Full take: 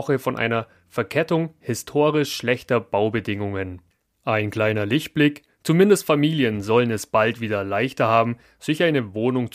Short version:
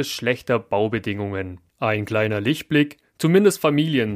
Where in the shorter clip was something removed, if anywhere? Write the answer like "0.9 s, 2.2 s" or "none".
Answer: 1.7 s